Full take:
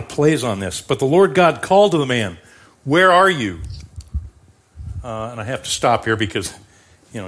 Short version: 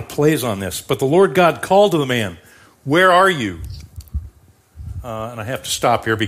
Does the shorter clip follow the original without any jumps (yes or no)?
yes